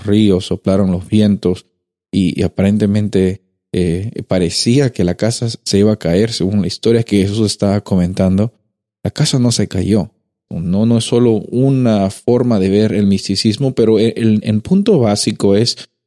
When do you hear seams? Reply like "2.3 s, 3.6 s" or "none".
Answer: 10.5 s